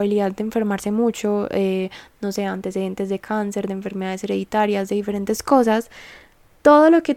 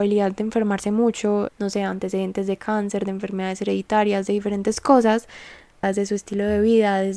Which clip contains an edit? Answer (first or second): second